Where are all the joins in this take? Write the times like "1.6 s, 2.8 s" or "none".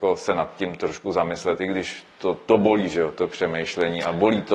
none

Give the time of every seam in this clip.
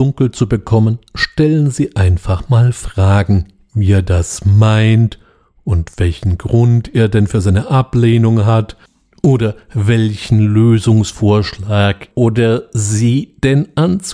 12.1 s

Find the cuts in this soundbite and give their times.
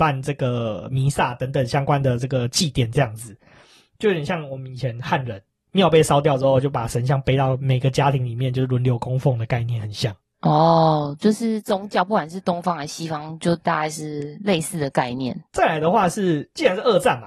15.5 s

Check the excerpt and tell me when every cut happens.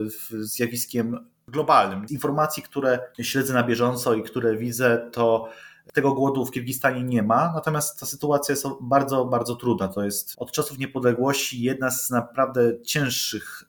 2.1 s, 10.3 s

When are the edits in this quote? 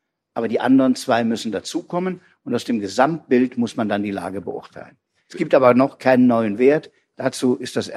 none

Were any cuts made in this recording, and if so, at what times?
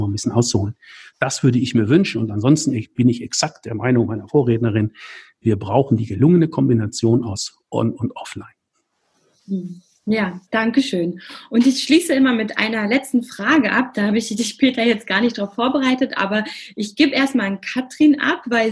none

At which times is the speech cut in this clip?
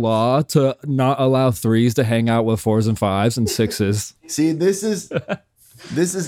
4.2 s

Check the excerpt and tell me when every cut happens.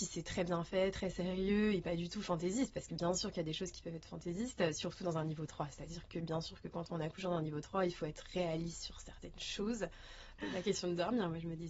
10.4 s

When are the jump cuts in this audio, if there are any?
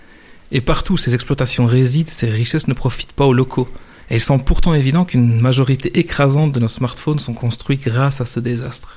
4.0 s

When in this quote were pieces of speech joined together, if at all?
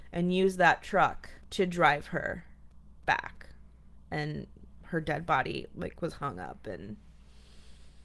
1.4 s

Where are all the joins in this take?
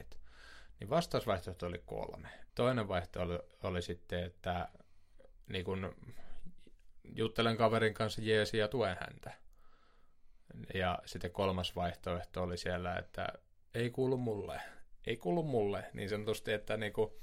2.5 s

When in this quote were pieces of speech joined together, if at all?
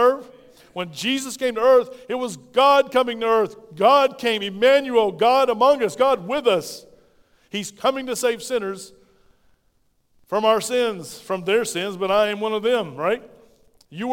none

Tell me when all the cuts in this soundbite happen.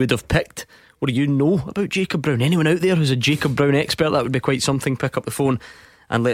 none

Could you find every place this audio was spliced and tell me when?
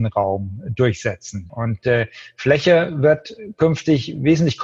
1.5 s

